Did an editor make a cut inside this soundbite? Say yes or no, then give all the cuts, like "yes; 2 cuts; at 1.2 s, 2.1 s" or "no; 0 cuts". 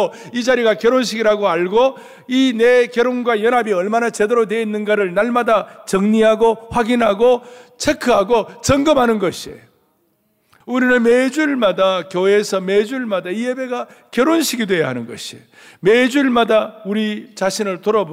yes; 1 cut; at 10.6 s